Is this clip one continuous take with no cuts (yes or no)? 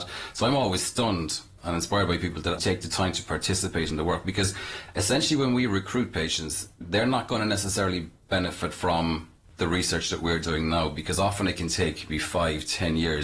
no